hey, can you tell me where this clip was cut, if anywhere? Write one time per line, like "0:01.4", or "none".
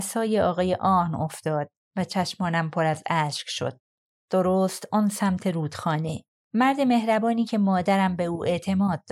0:04.2